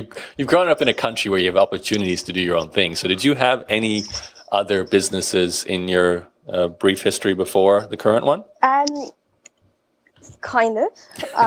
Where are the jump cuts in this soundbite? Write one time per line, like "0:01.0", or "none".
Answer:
0:08.5